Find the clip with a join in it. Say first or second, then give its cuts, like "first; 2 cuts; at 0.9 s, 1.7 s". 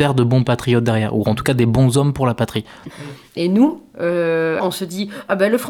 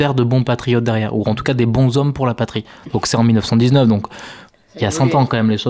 first; 2 cuts; at 2.9 s, 4.6 s